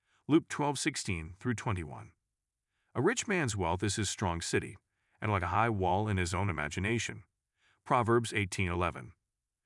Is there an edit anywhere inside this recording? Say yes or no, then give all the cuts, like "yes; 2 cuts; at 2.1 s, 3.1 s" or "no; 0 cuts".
no; 0 cuts